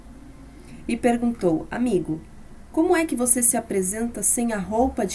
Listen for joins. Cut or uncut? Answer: uncut